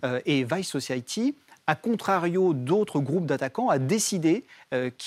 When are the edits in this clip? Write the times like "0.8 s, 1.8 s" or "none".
none